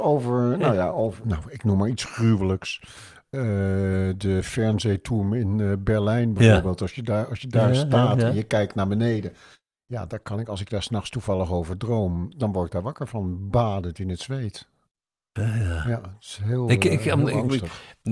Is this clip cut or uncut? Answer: cut